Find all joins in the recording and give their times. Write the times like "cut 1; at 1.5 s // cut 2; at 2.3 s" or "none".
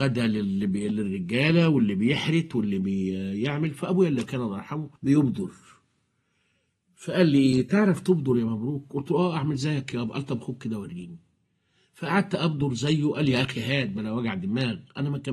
cut 1; at 5.0 s

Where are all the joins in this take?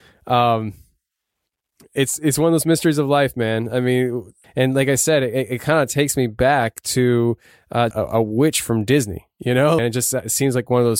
cut 1; at 4.4 s // cut 2; at 7.9 s // cut 3; at 9.8 s

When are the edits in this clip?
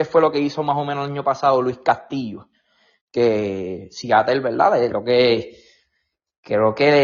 cut 1; at 4.9 s

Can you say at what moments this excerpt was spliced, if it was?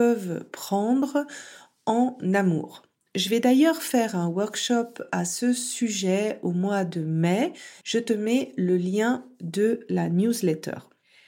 cut 1; at 7.8 s

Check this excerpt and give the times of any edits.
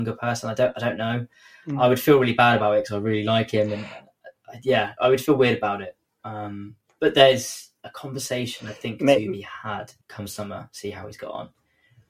cut 1; at 10.0 s

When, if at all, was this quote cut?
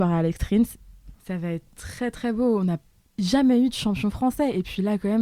cut 1; at 1.1 s

